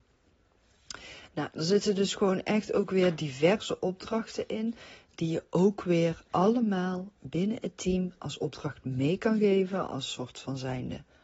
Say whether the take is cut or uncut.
uncut